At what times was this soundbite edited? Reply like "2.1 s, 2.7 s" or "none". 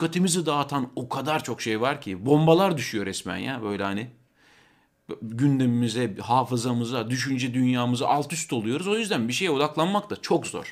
none